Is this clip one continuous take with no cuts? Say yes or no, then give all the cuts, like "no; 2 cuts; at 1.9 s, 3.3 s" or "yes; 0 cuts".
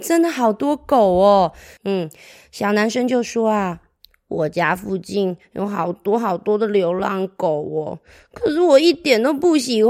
no; 1 cut; at 1.8 s